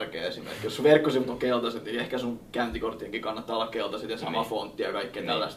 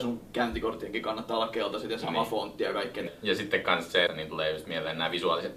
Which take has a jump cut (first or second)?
second